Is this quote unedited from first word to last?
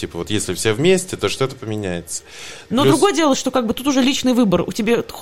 no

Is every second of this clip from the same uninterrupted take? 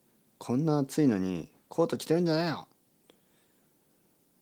yes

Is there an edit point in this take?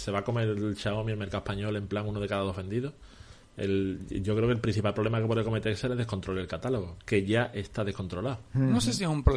no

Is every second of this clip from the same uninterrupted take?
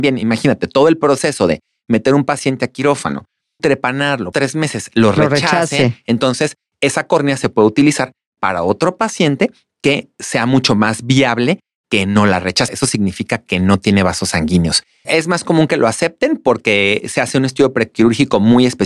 no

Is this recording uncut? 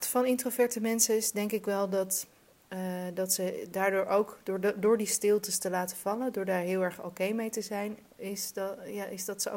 yes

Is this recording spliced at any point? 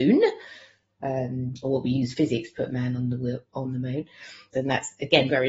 yes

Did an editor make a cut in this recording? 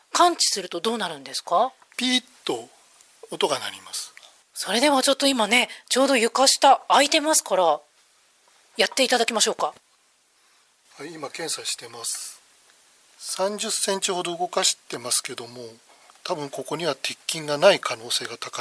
yes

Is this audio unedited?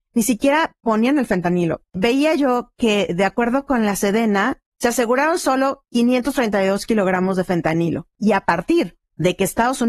no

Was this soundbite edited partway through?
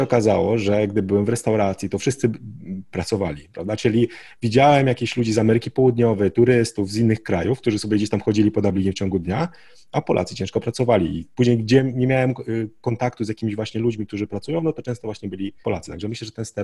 yes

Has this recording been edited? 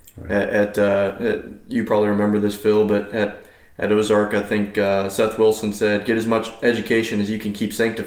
no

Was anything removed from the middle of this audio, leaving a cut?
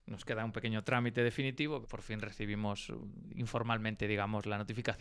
yes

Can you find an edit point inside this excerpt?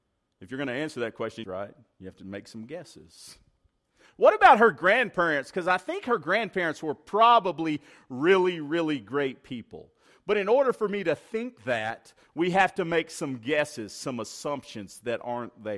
yes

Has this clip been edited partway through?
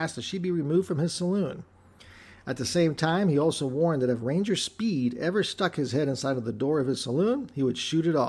no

